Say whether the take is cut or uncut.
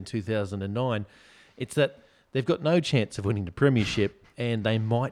uncut